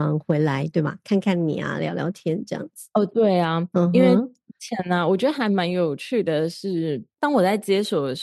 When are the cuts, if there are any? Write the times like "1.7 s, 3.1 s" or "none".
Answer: none